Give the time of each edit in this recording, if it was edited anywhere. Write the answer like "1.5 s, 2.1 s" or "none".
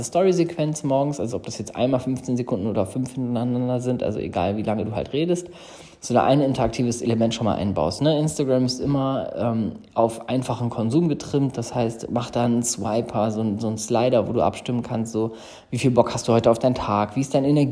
8.0 s